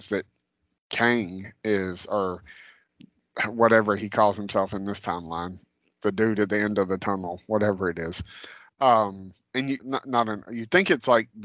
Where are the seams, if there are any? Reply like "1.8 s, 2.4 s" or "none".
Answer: 8.7 s, 9.8 s